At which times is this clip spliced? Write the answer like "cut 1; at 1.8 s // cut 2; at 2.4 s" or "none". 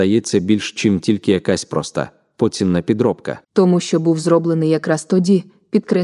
cut 1; at 3.4 s